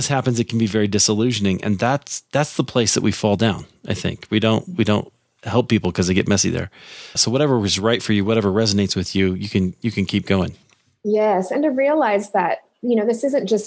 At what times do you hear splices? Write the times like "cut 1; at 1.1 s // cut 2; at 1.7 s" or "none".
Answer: cut 1; at 7.2 s